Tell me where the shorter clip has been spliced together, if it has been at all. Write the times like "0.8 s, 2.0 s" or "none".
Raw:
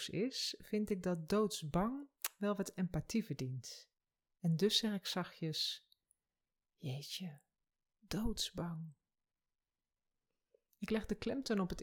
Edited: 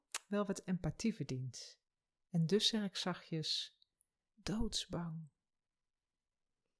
4.3 s